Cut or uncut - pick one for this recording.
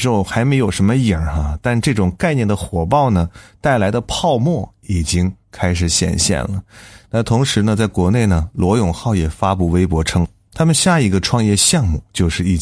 cut